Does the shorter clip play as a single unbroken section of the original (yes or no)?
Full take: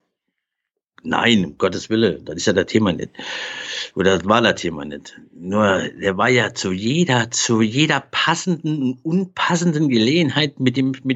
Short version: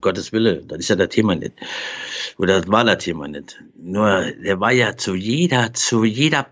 yes